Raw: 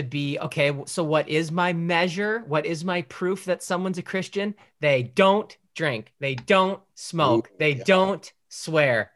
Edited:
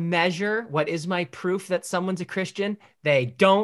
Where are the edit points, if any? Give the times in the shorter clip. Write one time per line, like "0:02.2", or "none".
none